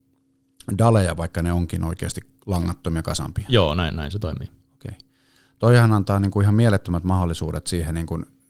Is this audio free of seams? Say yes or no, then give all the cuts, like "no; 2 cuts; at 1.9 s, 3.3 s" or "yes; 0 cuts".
yes; 0 cuts